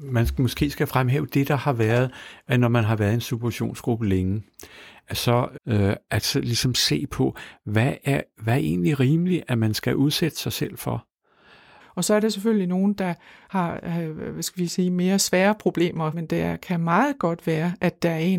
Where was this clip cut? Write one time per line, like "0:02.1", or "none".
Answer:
0:05.6
0:11.8
0:16.1